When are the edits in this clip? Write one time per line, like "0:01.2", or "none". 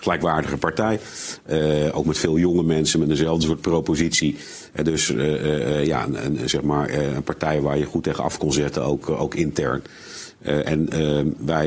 0:08.4